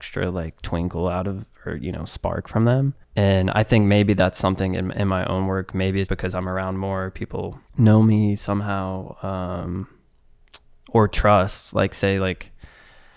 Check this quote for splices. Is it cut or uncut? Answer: cut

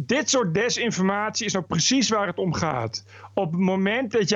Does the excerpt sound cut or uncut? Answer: uncut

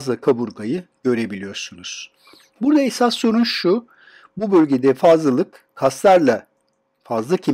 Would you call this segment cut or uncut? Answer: uncut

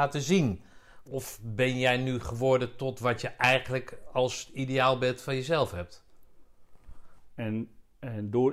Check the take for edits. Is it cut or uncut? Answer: cut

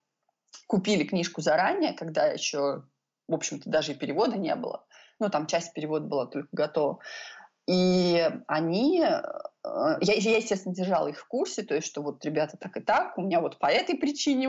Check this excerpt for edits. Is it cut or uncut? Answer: uncut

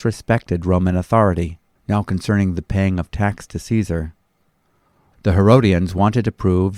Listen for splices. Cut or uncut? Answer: cut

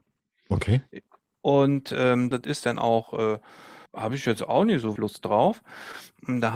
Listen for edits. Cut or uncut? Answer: cut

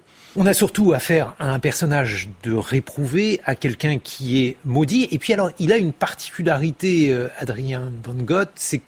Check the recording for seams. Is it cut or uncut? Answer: uncut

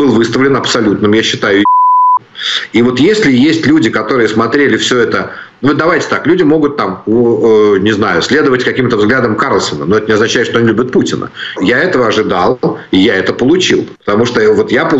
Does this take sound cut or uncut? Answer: cut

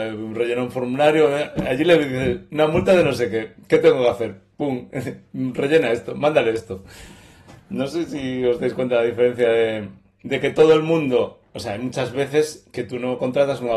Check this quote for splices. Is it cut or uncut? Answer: uncut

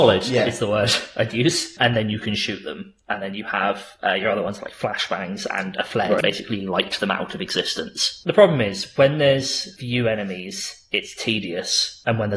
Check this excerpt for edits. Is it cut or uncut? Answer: cut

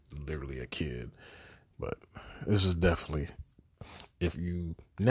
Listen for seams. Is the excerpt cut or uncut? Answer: cut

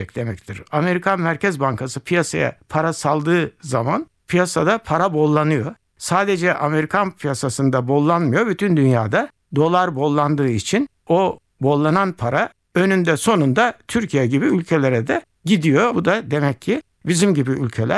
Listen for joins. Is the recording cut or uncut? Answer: cut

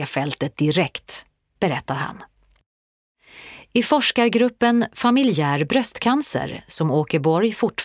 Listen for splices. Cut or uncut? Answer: uncut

